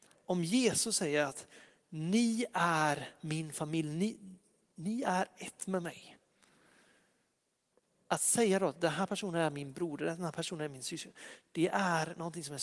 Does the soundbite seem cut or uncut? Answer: uncut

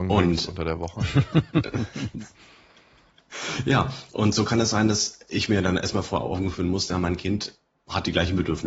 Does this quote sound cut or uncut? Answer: uncut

